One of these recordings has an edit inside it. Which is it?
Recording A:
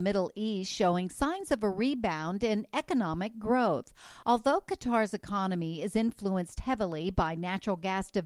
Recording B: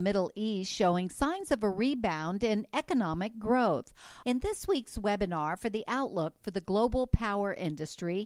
B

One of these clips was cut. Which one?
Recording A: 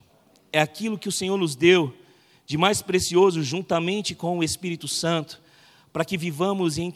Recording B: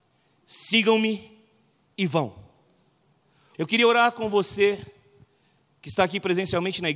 B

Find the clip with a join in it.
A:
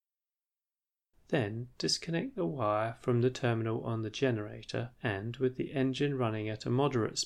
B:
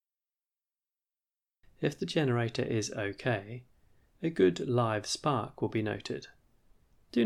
A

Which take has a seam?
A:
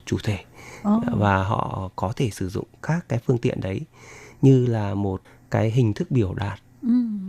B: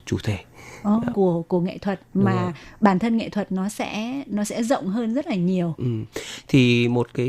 B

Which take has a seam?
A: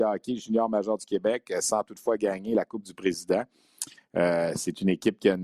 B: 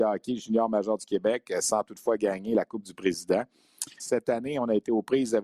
B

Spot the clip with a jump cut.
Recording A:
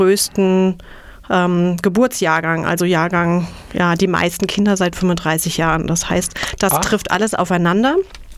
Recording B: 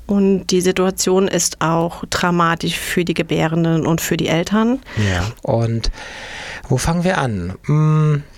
B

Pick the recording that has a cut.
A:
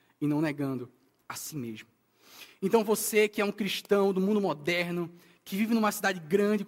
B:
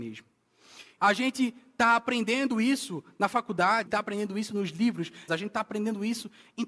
B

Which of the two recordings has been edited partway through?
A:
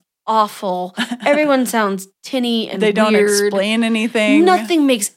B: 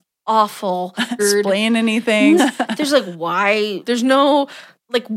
B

